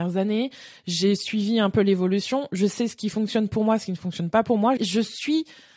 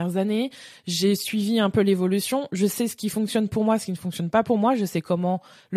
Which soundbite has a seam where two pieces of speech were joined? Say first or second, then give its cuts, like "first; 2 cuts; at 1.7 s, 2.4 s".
first; 1 cut; at 4.8 s